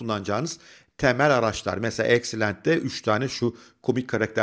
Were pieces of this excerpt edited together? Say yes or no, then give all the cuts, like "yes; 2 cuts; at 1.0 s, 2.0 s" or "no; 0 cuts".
no; 0 cuts